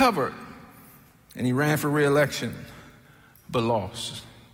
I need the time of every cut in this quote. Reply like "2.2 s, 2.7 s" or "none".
none

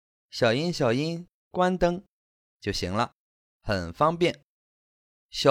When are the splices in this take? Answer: none

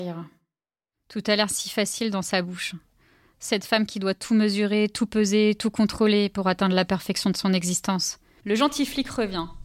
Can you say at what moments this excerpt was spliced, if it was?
8.4 s

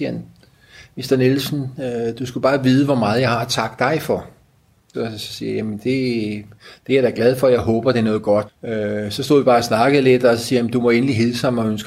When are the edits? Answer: 4.9 s, 8.5 s

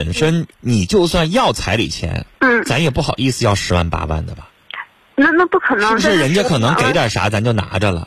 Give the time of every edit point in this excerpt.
2.3 s

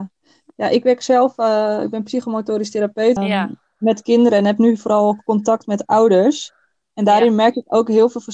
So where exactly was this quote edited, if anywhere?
3.2 s

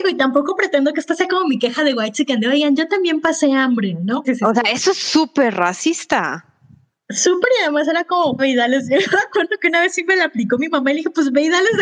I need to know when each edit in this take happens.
4.2 s, 8.4 s

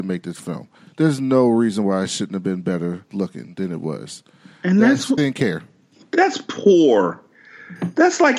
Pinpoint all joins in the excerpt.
5.2 s

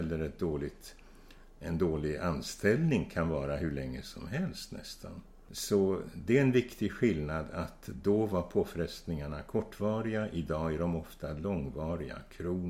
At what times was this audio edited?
none

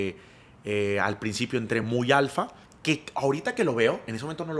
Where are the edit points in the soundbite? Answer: none

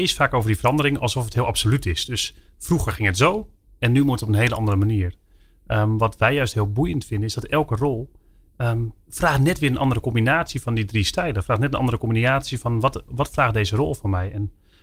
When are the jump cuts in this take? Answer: none

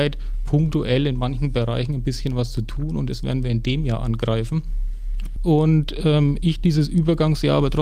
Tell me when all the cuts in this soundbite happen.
5.4 s

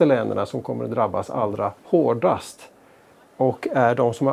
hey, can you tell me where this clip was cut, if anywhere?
1.8 s

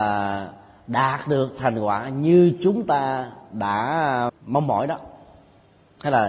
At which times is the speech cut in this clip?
4.3 s

